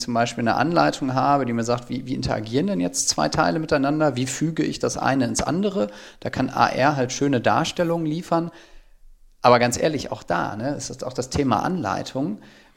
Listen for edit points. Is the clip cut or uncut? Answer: uncut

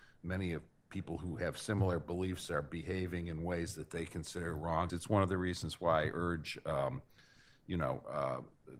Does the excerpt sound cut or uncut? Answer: cut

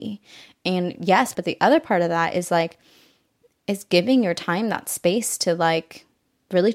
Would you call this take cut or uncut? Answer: cut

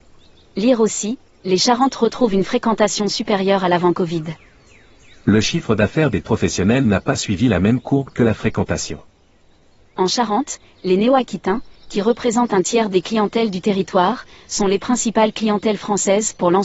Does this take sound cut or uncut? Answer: uncut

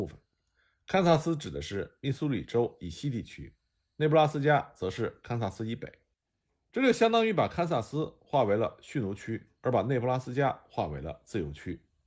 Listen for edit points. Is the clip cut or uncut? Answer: uncut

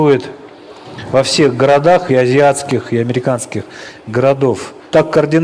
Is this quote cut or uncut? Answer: cut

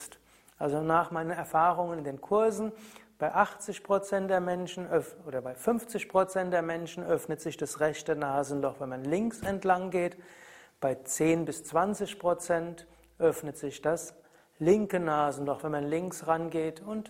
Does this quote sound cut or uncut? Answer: uncut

